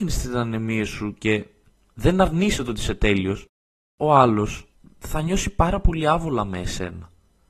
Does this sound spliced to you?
no; 0 cuts

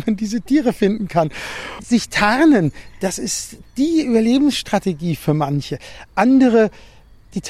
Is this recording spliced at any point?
no; 0 cuts

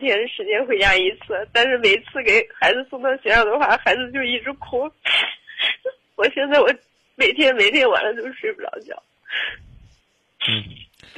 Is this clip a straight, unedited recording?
yes; 0 cuts

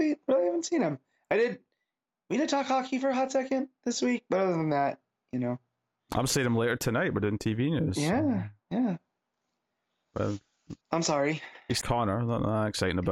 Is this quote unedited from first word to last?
no; 2 cuts; at 10.8 s, 11.8 s

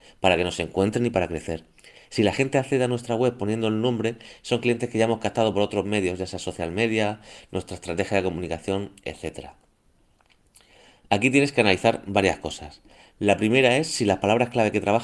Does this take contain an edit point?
no; 0 cuts

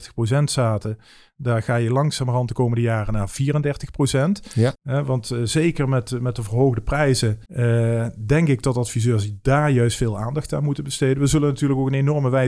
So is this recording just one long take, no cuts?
no; 2 cuts; at 4.7 s, 7.5 s

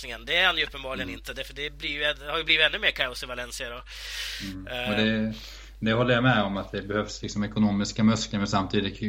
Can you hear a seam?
no; 0 cuts

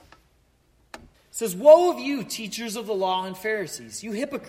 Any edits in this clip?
yes; 1 cut; at 1.1 s

